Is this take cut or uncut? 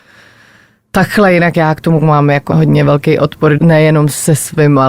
cut